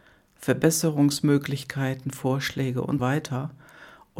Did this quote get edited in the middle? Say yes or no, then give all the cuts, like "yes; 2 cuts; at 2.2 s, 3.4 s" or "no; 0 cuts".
yes; 1 cut; at 3.0 s